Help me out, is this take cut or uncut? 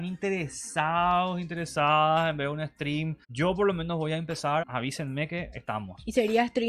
cut